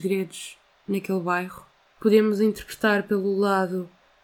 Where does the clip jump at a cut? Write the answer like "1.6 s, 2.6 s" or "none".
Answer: 1.9 s